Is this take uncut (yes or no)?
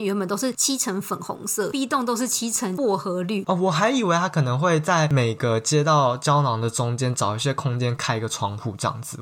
no